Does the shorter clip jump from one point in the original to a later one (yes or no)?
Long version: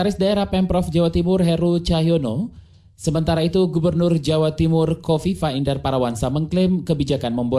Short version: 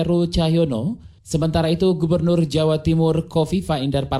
yes